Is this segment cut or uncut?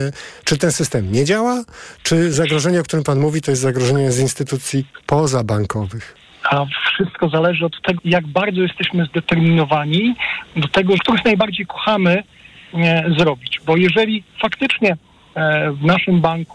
cut